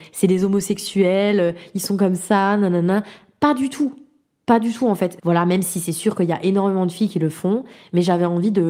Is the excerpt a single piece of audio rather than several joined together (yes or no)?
no